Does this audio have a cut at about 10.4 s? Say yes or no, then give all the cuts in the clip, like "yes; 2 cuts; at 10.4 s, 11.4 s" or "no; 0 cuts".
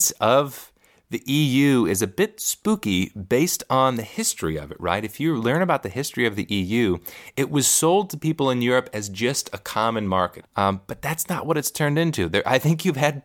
yes; 1 cut; at 10.4 s